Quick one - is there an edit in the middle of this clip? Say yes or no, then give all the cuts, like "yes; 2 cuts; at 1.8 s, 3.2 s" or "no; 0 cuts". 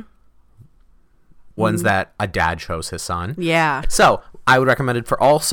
yes; 2 cuts; at 1.6 s, 3.8 s